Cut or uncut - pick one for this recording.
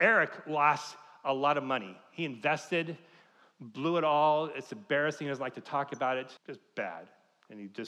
cut